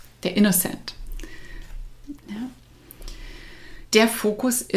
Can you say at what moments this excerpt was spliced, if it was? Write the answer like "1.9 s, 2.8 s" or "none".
2.2 s, 3.9 s